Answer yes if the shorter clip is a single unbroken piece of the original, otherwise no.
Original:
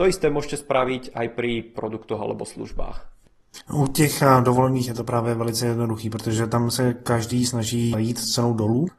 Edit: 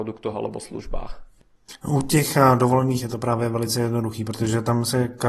yes